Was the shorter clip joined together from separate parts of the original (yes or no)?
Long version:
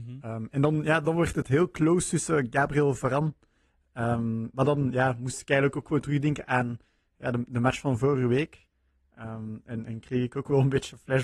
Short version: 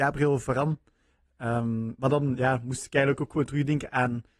no